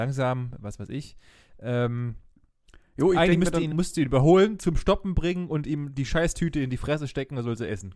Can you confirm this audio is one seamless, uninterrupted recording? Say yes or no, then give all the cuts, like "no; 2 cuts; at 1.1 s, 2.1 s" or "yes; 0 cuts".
yes; 0 cuts